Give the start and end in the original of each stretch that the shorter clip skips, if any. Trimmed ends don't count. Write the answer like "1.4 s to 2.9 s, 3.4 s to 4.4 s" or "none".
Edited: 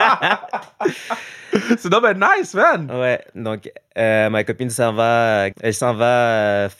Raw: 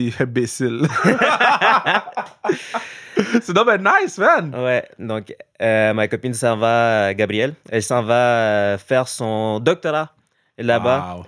7.2 s to 7.6 s